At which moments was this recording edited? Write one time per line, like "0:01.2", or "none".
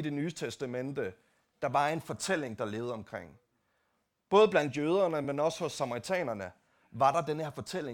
none